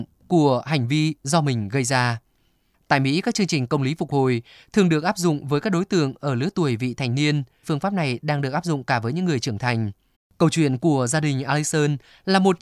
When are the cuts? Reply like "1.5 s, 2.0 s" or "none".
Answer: 7.6 s, 10.1 s